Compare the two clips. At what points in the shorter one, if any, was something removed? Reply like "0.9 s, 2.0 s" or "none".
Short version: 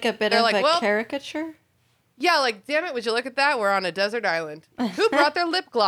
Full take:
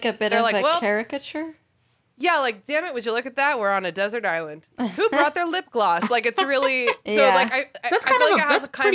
none